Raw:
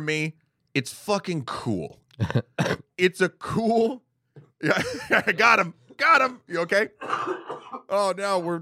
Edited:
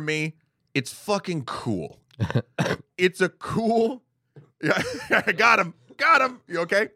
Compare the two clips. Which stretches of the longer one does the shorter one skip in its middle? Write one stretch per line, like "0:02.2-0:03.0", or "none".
none